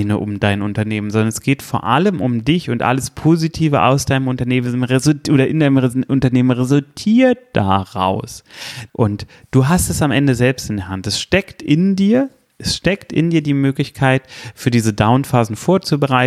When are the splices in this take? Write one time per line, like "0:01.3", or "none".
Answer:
0:08.9